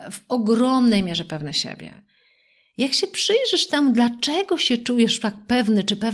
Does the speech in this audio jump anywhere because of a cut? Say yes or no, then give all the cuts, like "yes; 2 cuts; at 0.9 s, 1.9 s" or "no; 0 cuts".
no; 0 cuts